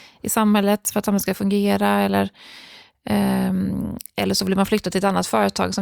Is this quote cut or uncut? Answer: uncut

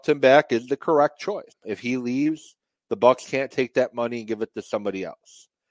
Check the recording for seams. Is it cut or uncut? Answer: cut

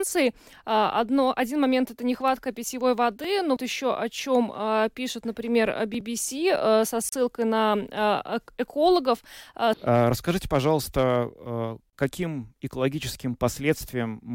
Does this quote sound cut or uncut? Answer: cut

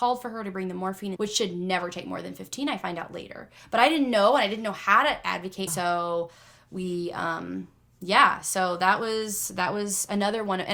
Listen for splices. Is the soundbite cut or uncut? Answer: cut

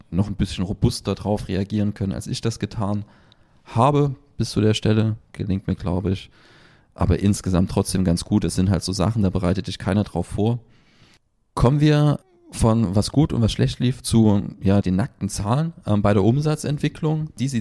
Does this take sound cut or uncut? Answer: cut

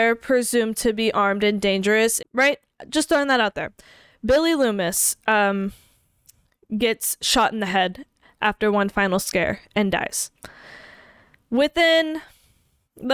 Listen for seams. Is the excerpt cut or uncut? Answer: cut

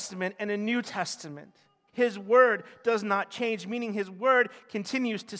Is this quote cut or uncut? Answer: cut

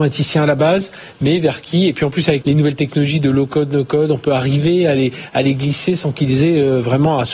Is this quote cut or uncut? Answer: cut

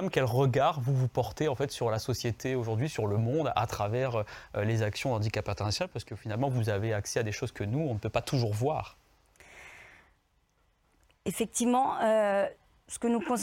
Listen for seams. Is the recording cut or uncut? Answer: uncut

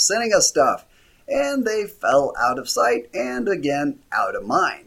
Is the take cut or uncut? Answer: uncut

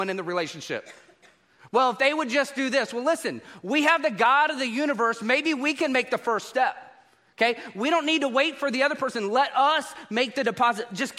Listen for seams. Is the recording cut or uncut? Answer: uncut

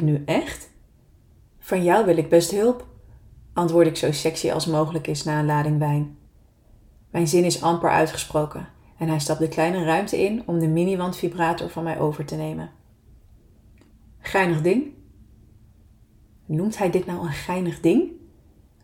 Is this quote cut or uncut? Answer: cut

